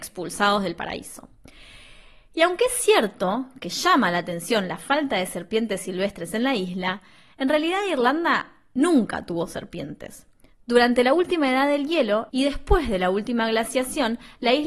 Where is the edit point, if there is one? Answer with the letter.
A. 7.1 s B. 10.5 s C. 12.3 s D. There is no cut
C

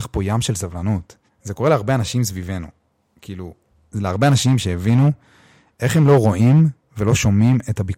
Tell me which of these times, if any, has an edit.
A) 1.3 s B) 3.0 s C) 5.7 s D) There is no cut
A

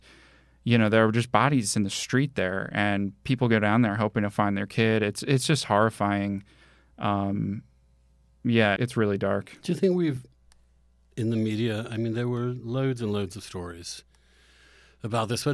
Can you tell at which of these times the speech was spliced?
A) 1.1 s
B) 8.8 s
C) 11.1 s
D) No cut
B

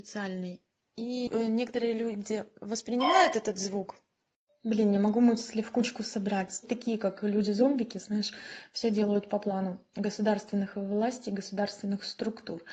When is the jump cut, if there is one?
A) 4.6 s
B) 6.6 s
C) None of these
B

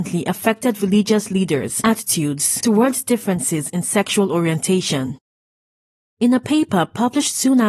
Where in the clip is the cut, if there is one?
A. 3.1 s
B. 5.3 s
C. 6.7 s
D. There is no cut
D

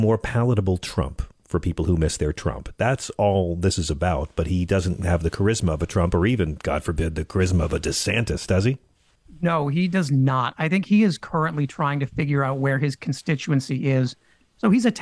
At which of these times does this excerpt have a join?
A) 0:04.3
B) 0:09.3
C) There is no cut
C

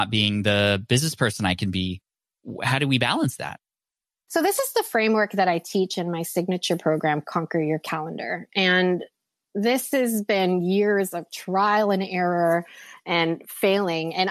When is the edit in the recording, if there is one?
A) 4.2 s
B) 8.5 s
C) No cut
C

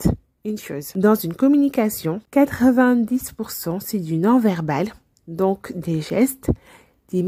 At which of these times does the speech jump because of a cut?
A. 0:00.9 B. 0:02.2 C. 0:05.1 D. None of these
D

